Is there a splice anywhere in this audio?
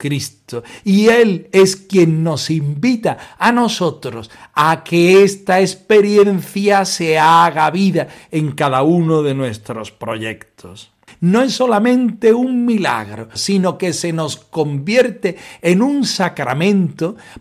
yes; 2 cuts; at 11.1 s, 13.4 s

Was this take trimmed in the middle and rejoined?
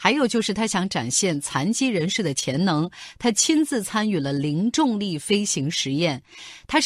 no; 0 cuts

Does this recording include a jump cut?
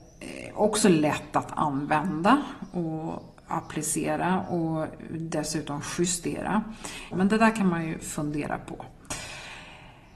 yes; 1 cut; at 7.1 s

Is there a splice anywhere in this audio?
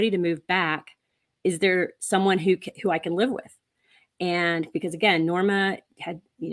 no; 0 cuts

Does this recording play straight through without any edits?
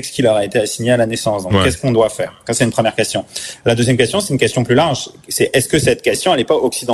yes; 0 cuts

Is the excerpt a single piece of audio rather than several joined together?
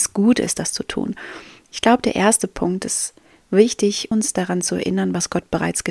no; 1 cut; at 4.1 s

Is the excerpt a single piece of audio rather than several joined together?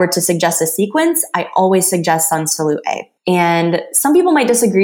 no; 1 cut; at 3.2 s

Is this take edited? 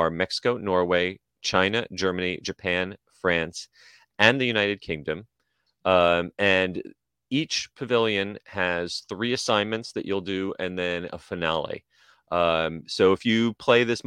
no; 0 cuts

